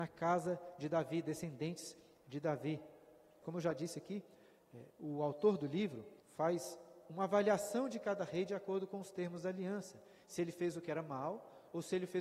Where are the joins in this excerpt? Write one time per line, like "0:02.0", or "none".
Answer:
0:03.4
0:06.2

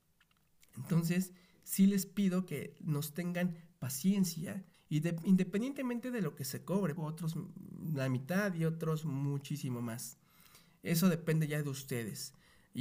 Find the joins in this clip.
0:04.7
0:07.0

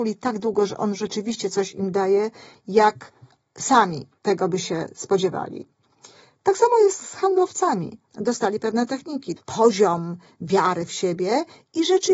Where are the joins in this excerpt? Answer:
0:08.1
0:09.4

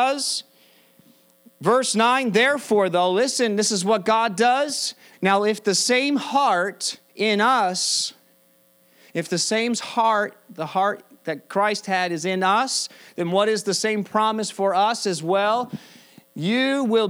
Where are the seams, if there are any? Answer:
0:05.1
0:07.1

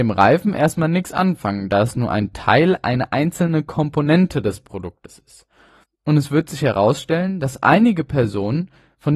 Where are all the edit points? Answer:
0:05.8

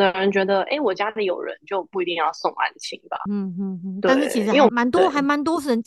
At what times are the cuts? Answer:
0:03.3
0:04.7

